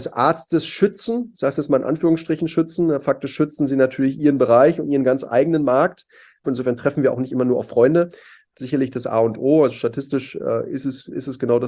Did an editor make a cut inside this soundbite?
yes; 2 cuts; at 6.4 s, 8.5 s

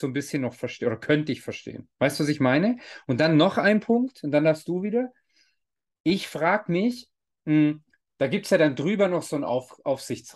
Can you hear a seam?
no; 0 cuts

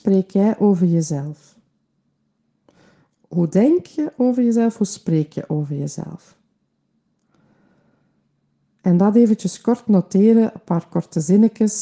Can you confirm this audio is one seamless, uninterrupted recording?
yes; 0 cuts

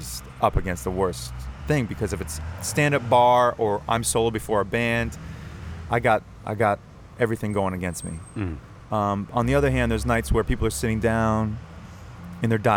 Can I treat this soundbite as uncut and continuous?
yes; 0 cuts

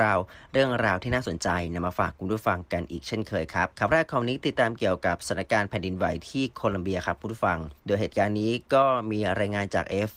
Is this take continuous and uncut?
no; 2 cuts; at 3.7 s, 7.8 s

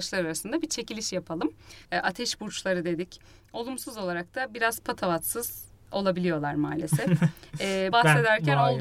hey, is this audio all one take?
no; 2 cuts; at 1.8 s, 7.9 s

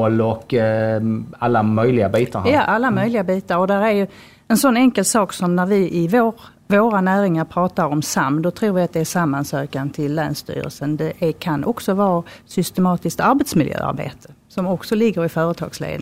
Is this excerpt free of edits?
yes; 0 cuts

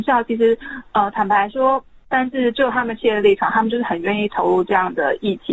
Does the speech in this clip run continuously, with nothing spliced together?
no; 1 cut; at 2.0 s

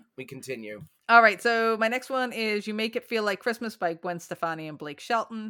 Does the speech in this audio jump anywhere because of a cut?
no; 0 cuts

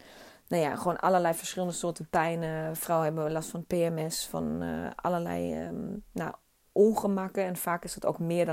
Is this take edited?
no; 0 cuts

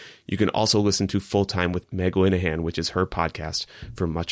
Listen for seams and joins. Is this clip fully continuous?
no; 1 cut; at 1.8 s

